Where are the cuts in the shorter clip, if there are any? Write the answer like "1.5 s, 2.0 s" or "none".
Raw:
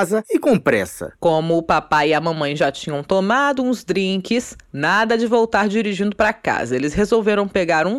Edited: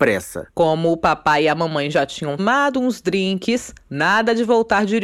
2.4 s